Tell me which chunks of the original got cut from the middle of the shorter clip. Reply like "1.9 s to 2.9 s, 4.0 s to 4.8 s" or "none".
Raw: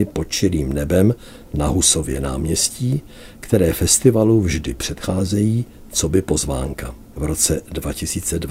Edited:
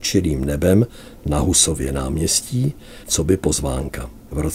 3.3 s to 5.9 s

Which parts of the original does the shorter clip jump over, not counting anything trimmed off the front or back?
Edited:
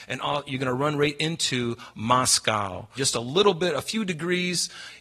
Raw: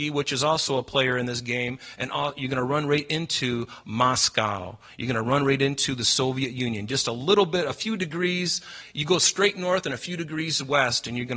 4.9 s to 6.9 s

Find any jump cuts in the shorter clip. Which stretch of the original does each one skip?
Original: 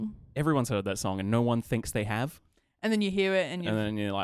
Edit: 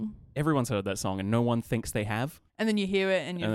2.5 s to 2.7 s

